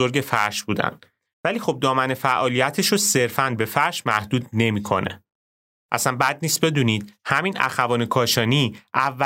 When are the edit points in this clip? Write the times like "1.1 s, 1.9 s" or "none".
5.8 s